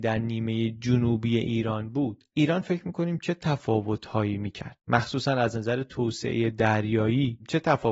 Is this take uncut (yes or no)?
no